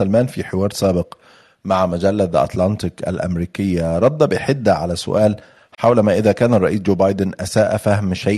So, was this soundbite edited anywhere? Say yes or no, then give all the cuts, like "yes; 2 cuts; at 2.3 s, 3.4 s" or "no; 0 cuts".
no; 0 cuts